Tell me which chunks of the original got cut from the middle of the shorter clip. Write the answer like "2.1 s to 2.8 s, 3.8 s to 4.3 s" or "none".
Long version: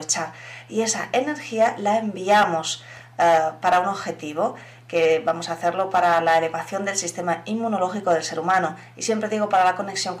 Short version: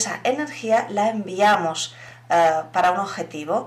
none